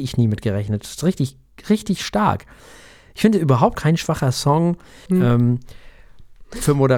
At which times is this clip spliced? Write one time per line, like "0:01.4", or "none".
0:03.8
0:05.1